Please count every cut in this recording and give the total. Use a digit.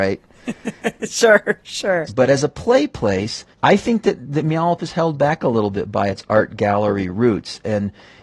2